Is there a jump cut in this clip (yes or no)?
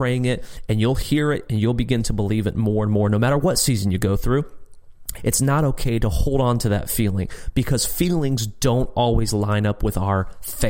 yes